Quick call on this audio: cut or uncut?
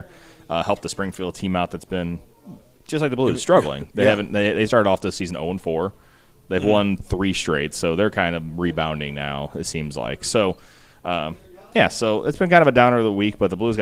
uncut